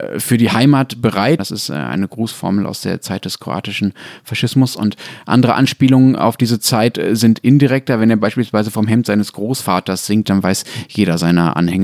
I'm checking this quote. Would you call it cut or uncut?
cut